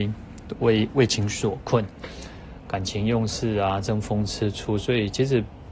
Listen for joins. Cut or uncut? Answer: uncut